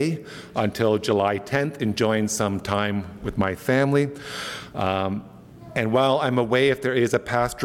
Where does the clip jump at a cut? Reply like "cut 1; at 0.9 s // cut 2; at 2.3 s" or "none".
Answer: none